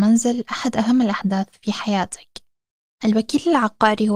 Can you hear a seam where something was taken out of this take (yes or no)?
yes